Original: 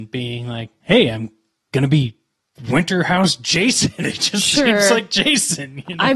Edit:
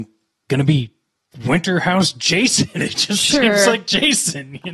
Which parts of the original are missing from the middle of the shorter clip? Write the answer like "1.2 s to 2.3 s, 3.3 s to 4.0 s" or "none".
none